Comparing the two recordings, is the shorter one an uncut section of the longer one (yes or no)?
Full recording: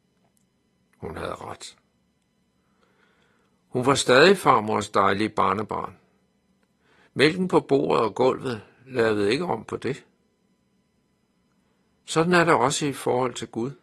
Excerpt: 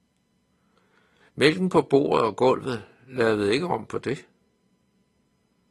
no